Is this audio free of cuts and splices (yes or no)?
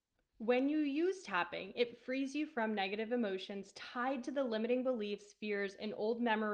yes